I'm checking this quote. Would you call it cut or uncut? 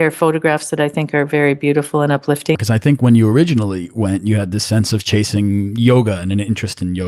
cut